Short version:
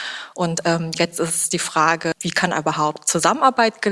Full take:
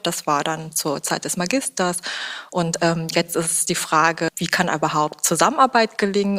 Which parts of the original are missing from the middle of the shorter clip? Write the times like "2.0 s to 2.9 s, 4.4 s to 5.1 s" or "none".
none